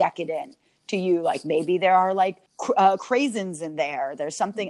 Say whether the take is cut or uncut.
cut